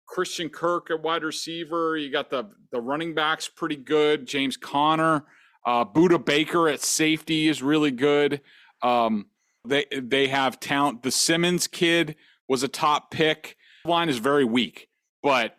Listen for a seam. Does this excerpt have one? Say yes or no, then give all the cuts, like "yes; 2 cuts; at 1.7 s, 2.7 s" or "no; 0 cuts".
yes; 2 cuts; at 9.6 s, 13.9 s